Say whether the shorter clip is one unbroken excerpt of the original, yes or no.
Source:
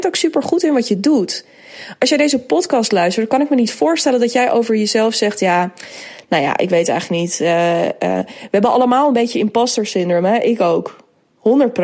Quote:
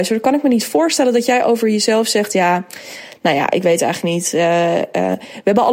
yes